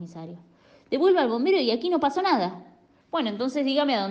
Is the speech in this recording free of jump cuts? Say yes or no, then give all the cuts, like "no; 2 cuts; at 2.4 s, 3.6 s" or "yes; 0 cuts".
no; 1 cut; at 3.0 s